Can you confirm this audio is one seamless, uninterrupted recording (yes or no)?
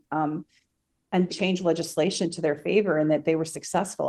no